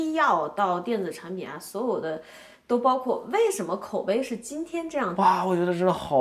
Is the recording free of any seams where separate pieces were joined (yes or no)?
no